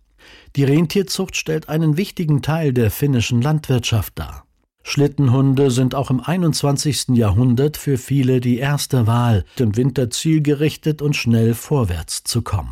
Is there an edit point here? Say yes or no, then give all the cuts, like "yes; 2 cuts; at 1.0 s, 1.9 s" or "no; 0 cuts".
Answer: yes; 1 cut; at 9.6 s